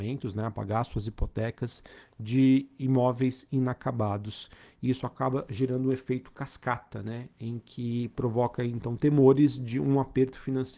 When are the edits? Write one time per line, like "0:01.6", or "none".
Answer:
none